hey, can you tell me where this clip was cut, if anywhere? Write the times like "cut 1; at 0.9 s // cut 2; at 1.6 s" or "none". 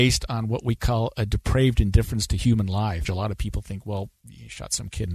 cut 1; at 3.0 s

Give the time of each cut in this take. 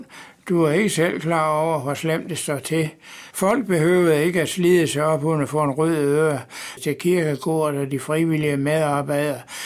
cut 1; at 3.3 s // cut 2; at 6.8 s

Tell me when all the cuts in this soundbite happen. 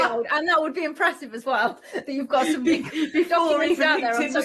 none

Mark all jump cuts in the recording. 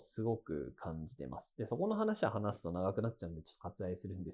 none

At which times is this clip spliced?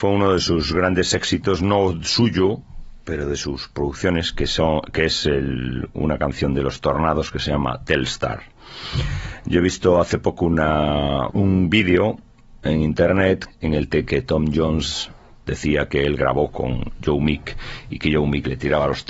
none

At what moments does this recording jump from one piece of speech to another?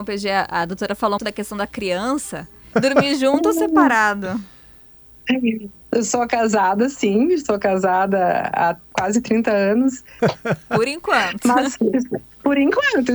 cut 1; at 1.2 s // cut 2; at 2.7 s // cut 3; at 10.2 s

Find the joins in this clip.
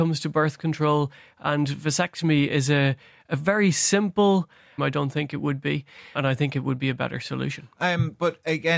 cut 1; at 4.8 s // cut 2; at 6.1 s

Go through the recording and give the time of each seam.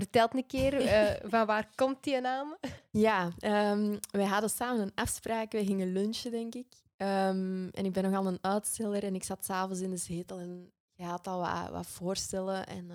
none

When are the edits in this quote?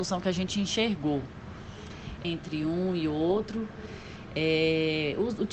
cut 1; at 2.2 s

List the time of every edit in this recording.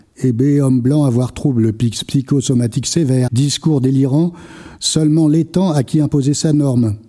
cut 1; at 3.3 s // cut 2; at 4.8 s

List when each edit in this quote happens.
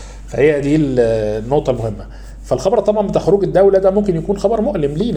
none

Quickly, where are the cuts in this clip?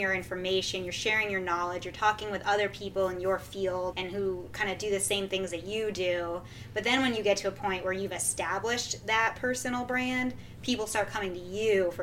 cut 1; at 3.9 s

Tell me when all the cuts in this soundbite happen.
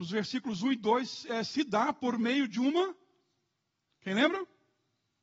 none

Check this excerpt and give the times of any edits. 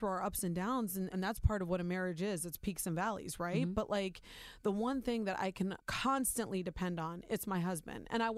cut 1; at 1.1 s

